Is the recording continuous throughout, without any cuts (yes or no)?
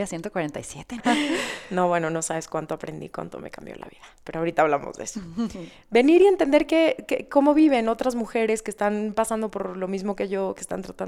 no